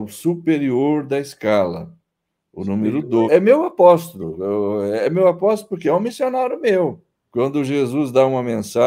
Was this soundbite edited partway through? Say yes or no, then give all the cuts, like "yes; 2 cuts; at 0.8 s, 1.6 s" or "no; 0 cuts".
yes; 2 cuts; at 3.3 s, 7.1 s